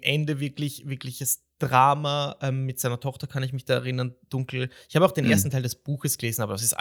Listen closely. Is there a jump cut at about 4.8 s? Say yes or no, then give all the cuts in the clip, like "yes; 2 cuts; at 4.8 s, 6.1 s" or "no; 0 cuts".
no; 0 cuts